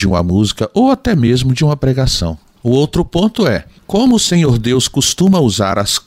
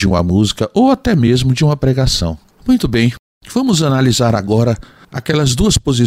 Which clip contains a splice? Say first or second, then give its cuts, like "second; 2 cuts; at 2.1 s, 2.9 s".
second; 1 cut; at 2.4 s